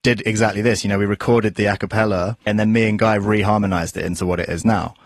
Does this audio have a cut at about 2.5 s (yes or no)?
yes